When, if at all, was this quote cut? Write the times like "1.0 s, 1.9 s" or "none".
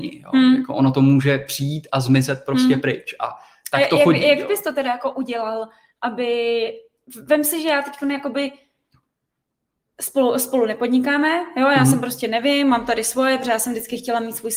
none